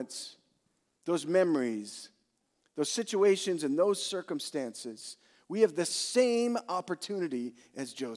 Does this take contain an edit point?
no; 0 cuts

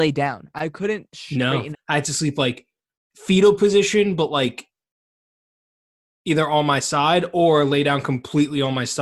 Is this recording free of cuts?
no; 1 cut; at 1.7 s

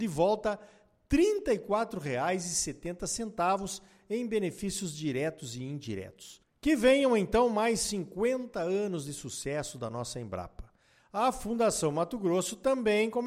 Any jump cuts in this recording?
no; 0 cuts

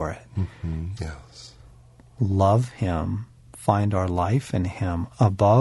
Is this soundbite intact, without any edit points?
no; 1 cut; at 1.0 s

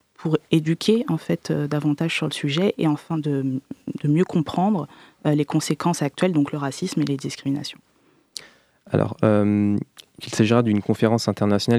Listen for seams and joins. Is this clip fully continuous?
no; 1 cut; at 10.2 s

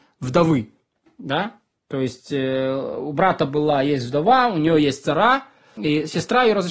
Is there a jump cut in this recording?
yes; 1 cut; at 5.8 s

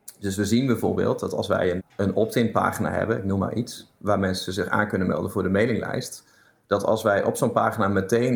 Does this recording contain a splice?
yes; 1 cut; at 1.8 s

